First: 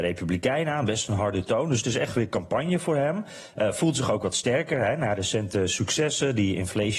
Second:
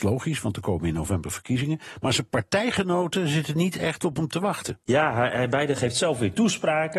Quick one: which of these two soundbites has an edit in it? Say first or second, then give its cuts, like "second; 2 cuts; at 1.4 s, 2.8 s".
second; 1 cut; at 4.8 s